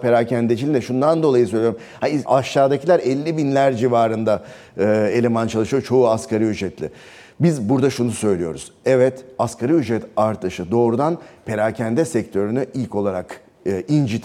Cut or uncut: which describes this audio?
cut